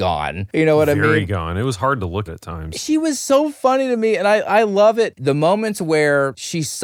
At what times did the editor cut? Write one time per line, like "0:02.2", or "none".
0:02.3
0:05.1